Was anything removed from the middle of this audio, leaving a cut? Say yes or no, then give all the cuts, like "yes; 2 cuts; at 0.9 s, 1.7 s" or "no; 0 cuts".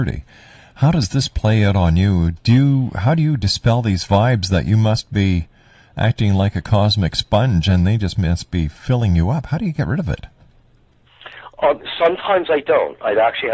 no; 0 cuts